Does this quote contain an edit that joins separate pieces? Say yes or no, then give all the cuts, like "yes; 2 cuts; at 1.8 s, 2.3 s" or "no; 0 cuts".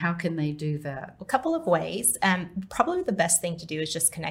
no; 0 cuts